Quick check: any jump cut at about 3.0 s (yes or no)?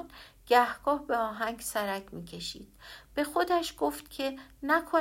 yes